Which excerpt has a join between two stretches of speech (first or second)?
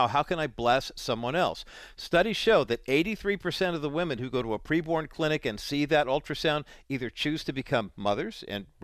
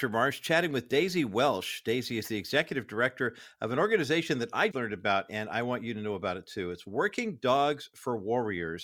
second